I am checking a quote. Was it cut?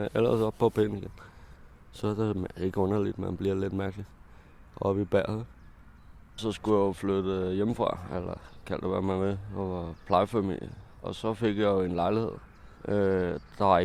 yes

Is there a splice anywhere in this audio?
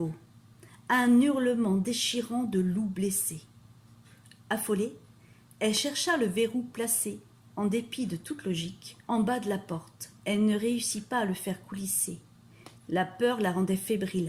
yes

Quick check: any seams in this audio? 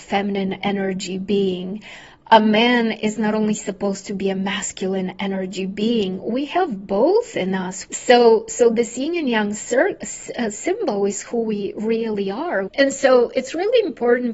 yes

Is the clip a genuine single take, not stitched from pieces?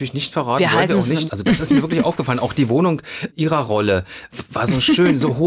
no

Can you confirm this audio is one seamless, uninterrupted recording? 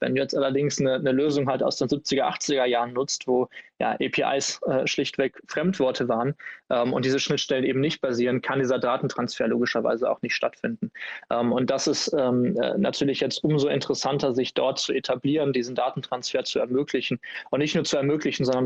yes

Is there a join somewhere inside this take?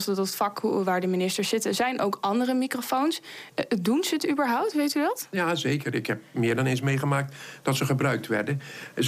no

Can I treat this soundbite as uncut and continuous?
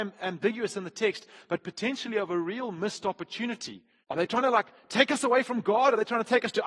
no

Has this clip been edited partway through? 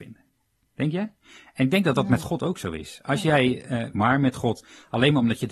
yes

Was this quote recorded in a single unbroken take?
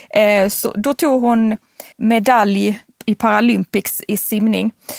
no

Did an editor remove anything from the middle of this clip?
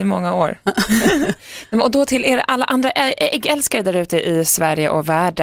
no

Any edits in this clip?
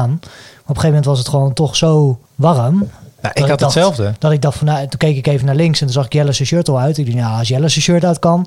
yes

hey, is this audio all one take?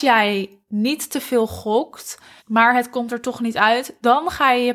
no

